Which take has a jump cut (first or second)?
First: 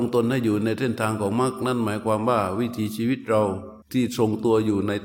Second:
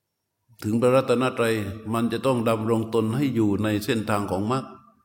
first